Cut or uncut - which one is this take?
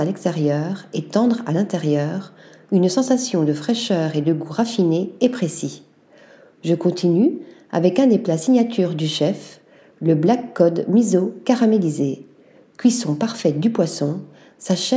uncut